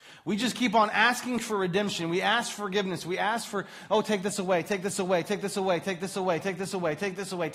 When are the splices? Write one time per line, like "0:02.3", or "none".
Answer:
none